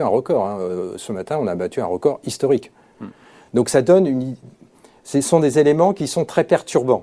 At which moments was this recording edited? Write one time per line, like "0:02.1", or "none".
none